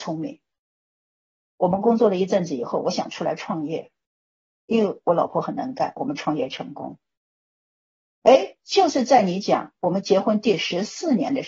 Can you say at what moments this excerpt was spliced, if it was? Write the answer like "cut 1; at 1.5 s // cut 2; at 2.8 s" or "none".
none